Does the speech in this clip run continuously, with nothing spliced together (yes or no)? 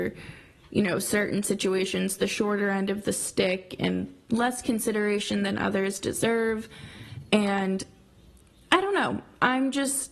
yes